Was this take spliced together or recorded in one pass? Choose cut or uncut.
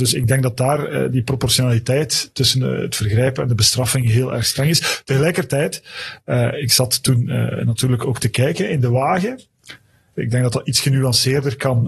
cut